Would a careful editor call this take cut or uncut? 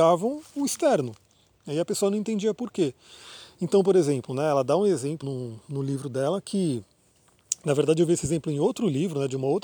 cut